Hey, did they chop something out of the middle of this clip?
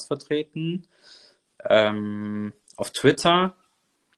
no; 0 cuts

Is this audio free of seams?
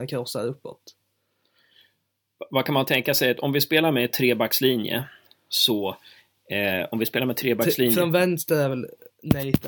yes; 0 cuts

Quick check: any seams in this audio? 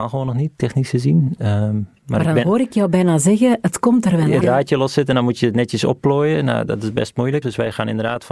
yes; 2 cuts; at 4.4 s, 7.4 s

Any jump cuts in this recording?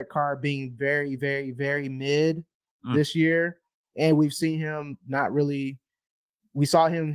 no; 0 cuts

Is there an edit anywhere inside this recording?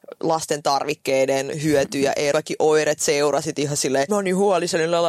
yes; 2 cuts; at 2.3 s, 4.1 s

